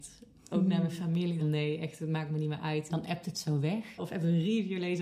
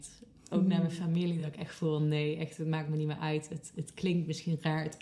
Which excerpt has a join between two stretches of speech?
first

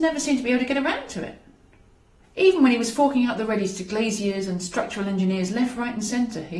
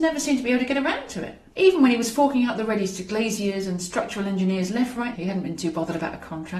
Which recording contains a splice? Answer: second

